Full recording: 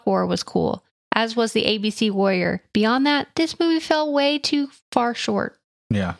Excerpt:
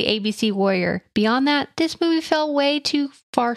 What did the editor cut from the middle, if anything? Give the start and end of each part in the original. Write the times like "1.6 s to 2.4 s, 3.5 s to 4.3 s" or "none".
none

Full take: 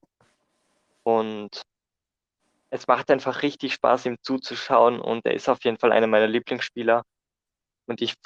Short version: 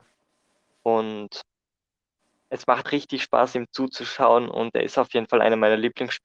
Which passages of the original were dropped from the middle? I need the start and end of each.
3.1 s to 3.4 s

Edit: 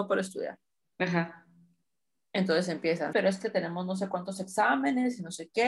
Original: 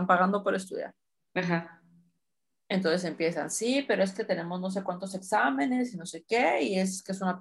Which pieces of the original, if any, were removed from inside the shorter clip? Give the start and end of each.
3.5 s to 3.9 s

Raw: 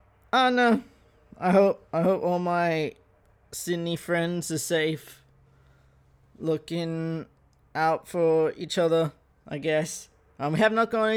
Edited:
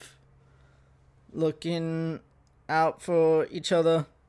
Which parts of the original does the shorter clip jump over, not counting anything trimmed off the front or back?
none

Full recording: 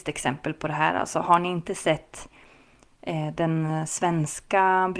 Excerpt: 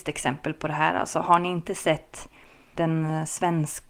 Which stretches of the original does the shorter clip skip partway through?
2.7 s to 3.4 s

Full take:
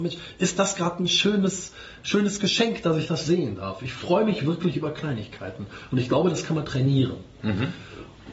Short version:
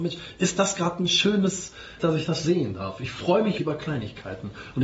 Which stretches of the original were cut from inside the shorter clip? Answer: 2.0 s to 2.8 s, 4.4 s to 4.7 s

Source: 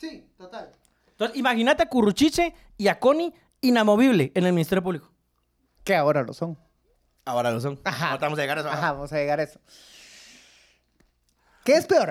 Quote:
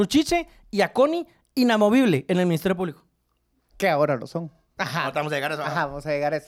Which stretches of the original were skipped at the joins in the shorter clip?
6.8 s to 7.8 s

